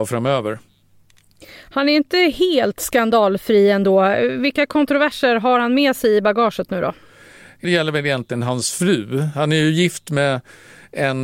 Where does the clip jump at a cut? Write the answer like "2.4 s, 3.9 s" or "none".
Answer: 7.6 s

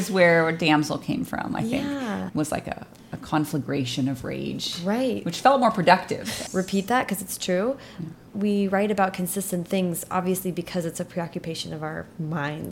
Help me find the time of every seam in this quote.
6.5 s, 8.3 s

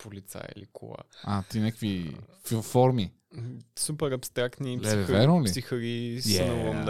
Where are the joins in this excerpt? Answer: none

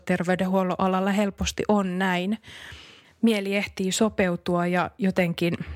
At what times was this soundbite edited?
3.0 s

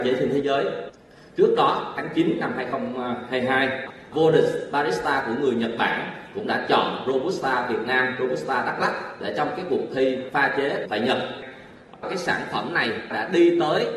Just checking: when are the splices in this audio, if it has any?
none

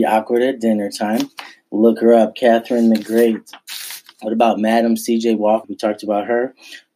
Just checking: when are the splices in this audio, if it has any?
5.6 s

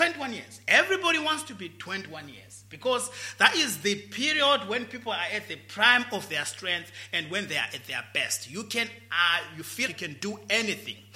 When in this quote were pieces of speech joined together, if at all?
9.9 s

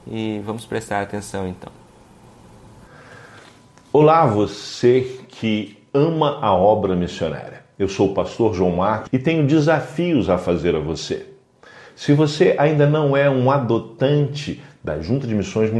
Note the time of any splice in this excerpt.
9.1 s

